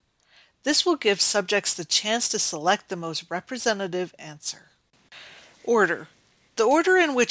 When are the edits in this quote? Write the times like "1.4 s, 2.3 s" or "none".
none